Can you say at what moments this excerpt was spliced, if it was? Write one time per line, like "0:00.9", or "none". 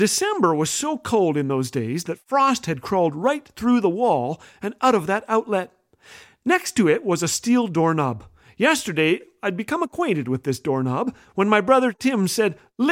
none